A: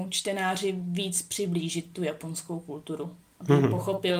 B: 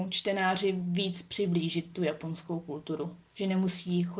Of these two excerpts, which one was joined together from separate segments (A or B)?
B